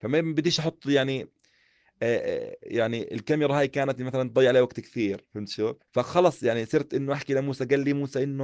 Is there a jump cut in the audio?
yes; 1 cut; at 5.8 s

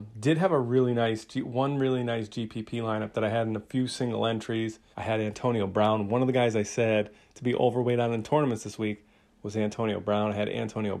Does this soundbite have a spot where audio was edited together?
yes; 1 cut; at 4.9 s

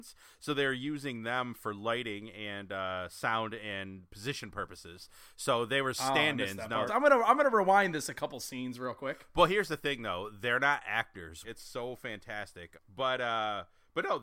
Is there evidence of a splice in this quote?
yes; 3 cuts; at 6.9 s, 11.4 s, 12.7 s

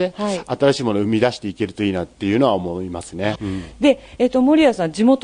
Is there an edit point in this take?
yes; 1 cut; at 3.3 s

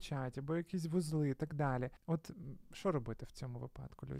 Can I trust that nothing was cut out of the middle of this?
no; 1 cut; at 2.0 s

